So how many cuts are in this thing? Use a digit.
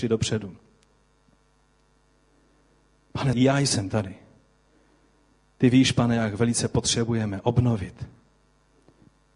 1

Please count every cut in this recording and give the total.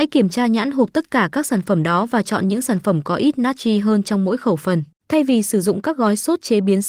1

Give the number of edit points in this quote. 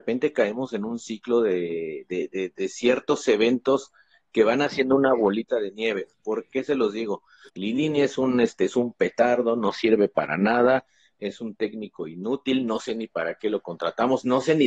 1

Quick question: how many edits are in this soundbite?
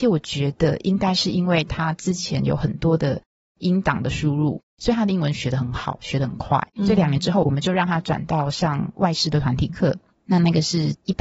1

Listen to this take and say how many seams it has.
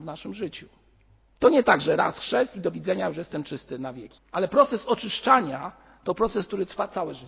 2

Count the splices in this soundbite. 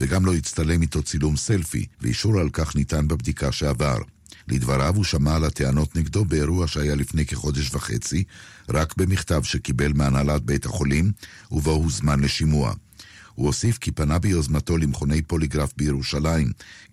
2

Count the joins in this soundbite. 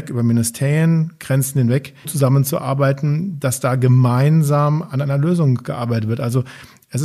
1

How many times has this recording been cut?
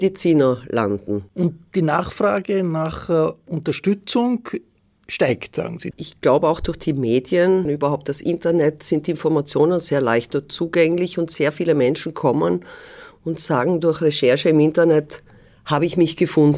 2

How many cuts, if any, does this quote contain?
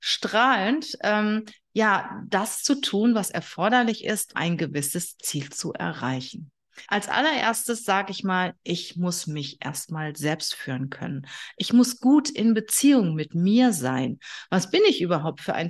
2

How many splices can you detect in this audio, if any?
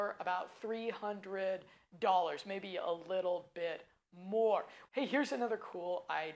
1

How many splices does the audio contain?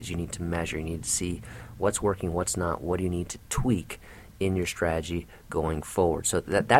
0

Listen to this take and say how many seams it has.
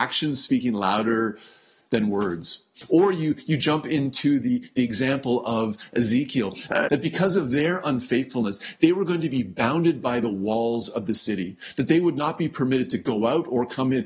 1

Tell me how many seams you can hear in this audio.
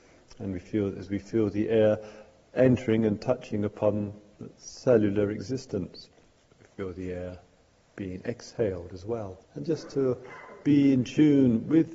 1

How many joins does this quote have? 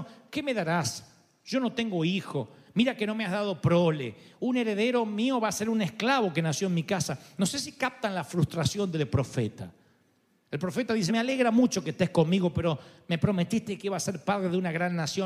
1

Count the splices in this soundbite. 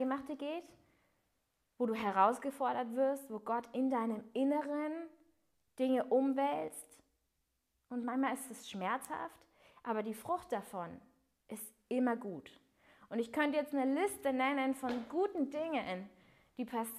0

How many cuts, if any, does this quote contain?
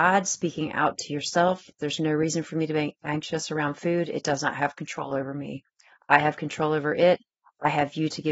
1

